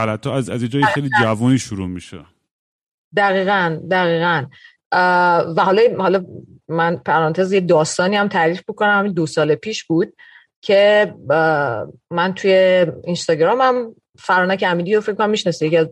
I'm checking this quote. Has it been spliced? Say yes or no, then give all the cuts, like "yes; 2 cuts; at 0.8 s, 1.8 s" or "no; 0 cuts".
no; 0 cuts